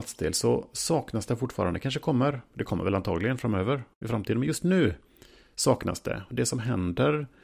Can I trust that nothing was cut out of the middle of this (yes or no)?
yes